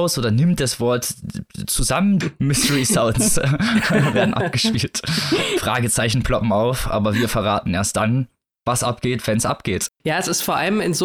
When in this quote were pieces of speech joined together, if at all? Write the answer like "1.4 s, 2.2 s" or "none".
2.2 s, 9.9 s